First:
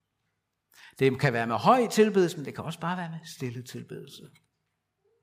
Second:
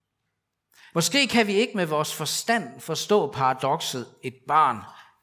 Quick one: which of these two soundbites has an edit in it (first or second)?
second